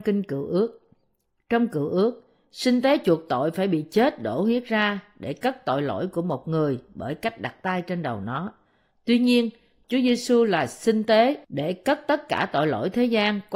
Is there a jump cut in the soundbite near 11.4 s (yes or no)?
yes